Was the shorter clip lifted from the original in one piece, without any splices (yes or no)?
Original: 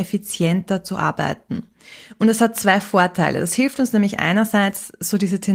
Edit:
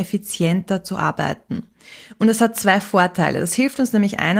yes